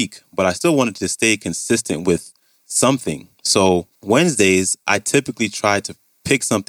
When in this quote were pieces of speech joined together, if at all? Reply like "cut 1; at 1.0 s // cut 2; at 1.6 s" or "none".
cut 1; at 3.9 s